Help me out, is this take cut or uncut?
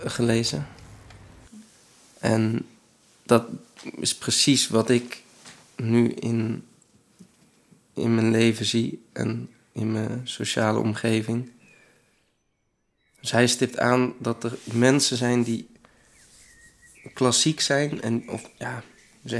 uncut